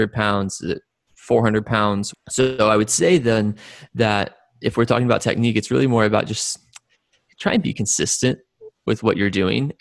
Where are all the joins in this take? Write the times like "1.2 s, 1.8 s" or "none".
2.1 s